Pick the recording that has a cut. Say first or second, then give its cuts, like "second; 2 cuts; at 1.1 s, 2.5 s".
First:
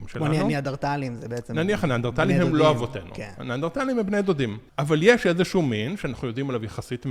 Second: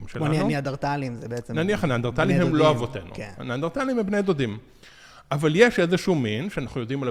first; 1 cut; at 4.7 s